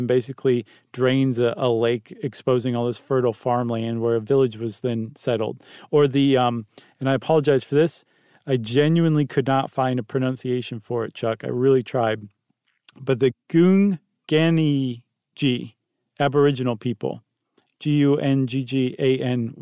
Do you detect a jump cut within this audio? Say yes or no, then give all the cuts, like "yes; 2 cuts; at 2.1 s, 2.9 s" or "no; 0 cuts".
no; 0 cuts